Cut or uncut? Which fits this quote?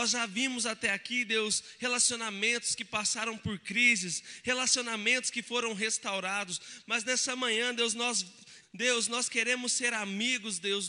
cut